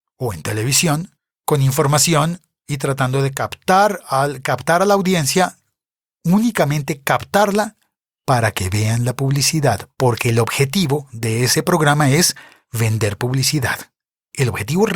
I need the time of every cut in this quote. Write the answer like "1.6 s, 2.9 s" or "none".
9.9 s